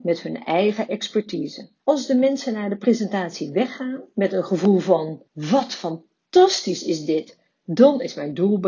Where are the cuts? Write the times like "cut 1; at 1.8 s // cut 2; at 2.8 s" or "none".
cut 1; at 1.8 s // cut 2; at 5.3 s // cut 3; at 7.5 s